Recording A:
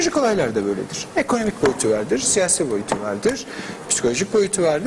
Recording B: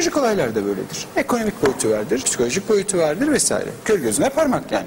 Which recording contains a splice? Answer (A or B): B